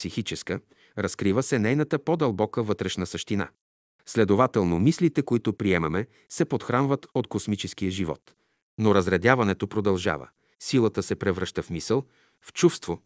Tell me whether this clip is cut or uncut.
cut